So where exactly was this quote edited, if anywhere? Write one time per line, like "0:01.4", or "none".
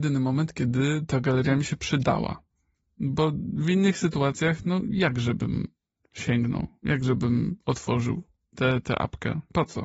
none